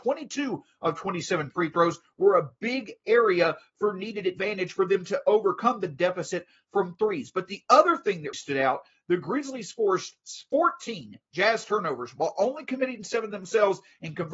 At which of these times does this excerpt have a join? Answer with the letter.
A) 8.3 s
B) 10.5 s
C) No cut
A